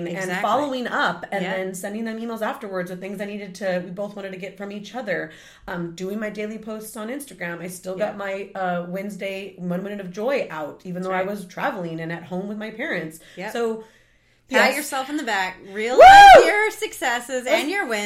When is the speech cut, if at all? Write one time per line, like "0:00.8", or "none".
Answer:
none